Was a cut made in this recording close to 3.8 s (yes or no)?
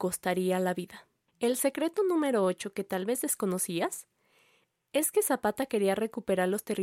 no